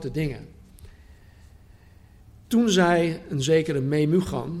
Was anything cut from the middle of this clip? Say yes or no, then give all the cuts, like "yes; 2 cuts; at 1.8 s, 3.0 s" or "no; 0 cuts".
yes; 1 cut; at 2.4 s